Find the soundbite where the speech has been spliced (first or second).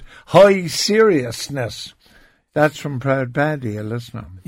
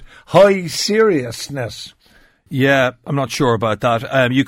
second